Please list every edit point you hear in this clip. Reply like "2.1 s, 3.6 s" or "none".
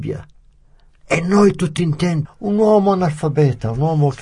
2.2 s